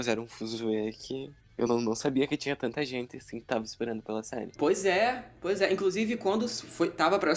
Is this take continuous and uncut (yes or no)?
yes